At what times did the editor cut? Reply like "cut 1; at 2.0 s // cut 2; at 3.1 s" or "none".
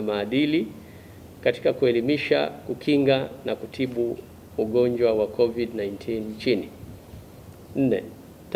none